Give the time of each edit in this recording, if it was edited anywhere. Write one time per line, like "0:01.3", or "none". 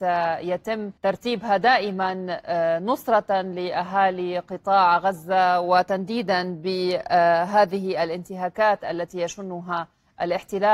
0:01.0